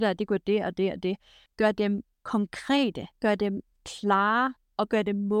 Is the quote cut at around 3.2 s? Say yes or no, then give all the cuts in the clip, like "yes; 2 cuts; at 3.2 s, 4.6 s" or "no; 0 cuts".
yes; 2 cuts; at 1.5 s, 3.2 s